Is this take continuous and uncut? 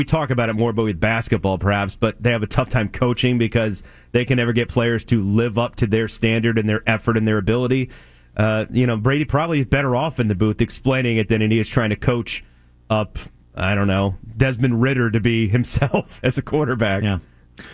yes; 0 cuts

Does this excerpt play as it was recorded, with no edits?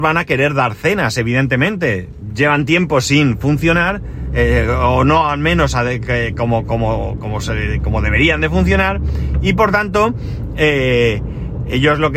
yes; 0 cuts

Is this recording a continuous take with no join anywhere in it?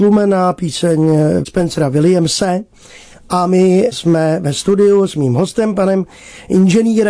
yes; 0 cuts

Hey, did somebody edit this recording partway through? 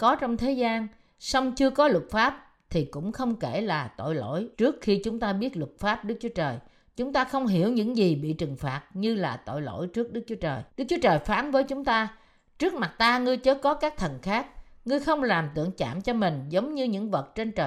yes; 2 cuts; at 4.5 s, 10.7 s

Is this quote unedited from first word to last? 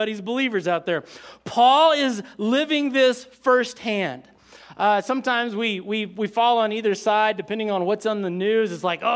yes; 0 cuts

